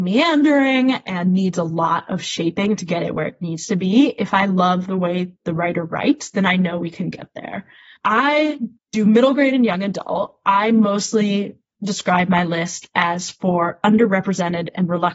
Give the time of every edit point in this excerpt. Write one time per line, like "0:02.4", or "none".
none